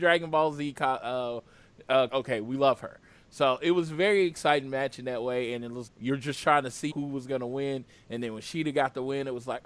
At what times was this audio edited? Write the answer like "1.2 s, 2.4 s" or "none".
2.1 s, 5.9 s, 6.9 s